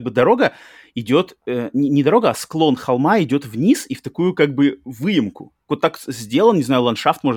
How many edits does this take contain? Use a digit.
1